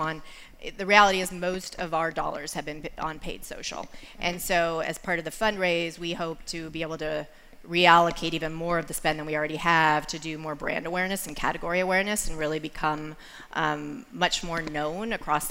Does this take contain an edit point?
no; 0 cuts

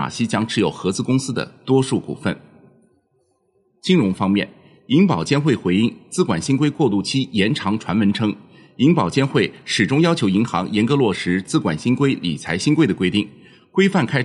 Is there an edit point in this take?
no; 0 cuts

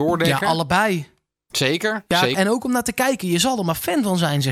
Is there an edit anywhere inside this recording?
yes; 1 cut; at 2.3 s

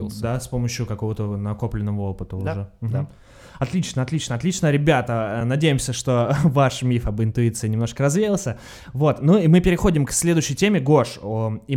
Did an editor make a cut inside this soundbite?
no; 0 cuts

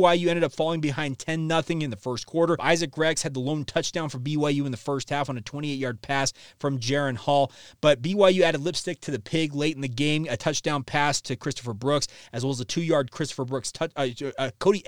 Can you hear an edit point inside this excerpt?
yes; 1 cut; at 2.6 s

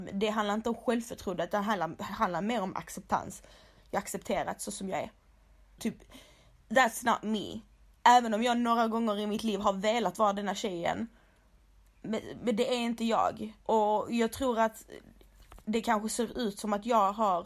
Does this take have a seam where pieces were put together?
yes; 2 cuts; at 5.8 s, 13.6 s

